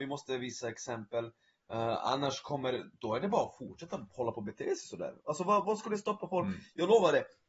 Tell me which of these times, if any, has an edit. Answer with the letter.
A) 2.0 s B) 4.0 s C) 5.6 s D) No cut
C